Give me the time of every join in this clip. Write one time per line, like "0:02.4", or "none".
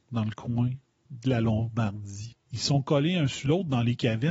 0:02.3